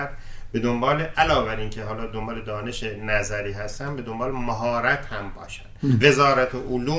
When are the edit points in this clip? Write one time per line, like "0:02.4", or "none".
0:06.0